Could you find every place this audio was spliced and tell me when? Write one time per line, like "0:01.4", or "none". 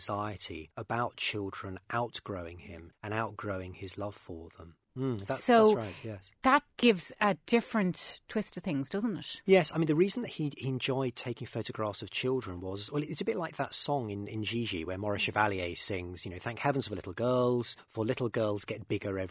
0:04.9